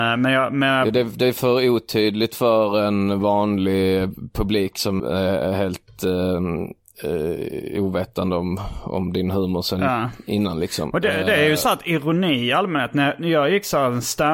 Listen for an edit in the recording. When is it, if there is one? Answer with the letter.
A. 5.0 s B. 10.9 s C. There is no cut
A